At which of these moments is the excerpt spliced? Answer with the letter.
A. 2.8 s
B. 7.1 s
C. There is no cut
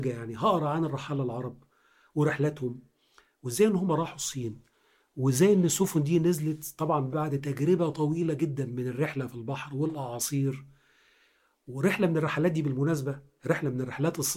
B